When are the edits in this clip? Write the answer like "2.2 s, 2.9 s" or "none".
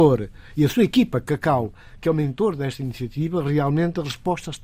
none